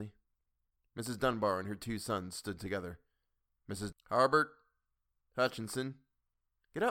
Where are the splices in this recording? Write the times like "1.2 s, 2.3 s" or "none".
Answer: 3.9 s

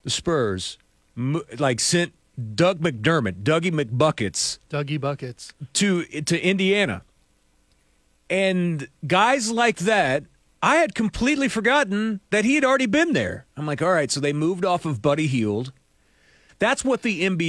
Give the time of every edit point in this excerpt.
16.5 s

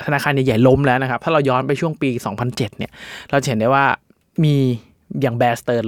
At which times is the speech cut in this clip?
none

